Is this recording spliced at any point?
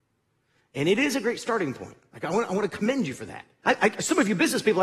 yes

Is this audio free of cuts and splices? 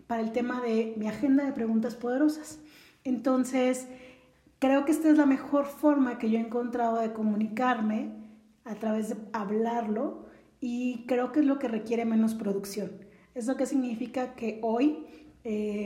yes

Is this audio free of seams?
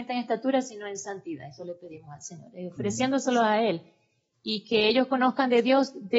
yes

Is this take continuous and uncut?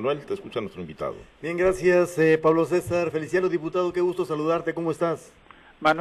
yes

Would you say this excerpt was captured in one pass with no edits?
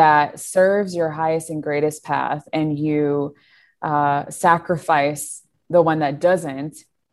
yes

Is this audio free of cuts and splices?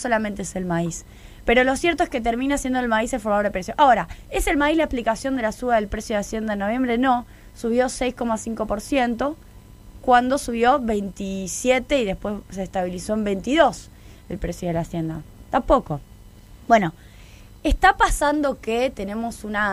yes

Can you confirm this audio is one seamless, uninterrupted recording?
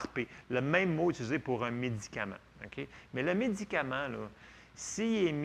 yes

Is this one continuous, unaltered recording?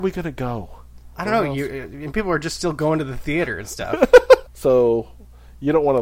no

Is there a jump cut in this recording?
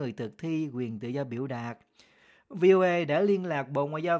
no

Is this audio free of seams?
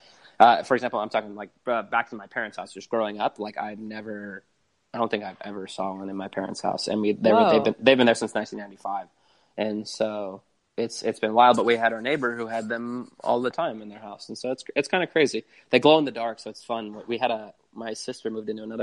yes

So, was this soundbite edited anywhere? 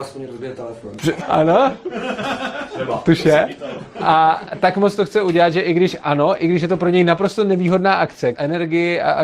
yes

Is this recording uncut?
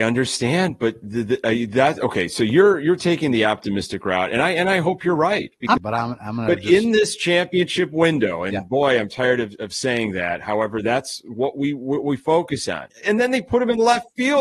no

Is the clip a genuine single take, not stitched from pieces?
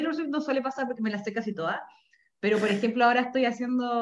yes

